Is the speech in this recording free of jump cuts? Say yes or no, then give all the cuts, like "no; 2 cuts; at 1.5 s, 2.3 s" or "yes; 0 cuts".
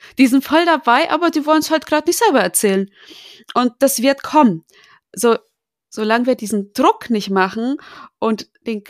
yes; 0 cuts